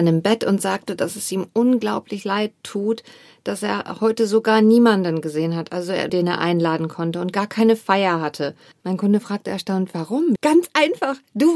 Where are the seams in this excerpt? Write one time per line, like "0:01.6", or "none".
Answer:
0:06.1
0:08.8
0:10.4